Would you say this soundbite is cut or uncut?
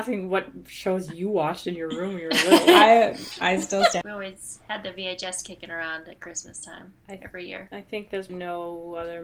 cut